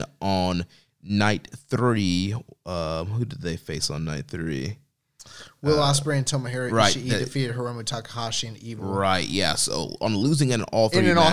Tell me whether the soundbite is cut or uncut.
uncut